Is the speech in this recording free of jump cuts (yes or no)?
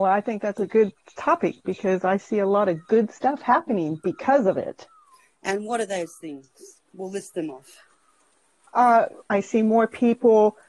no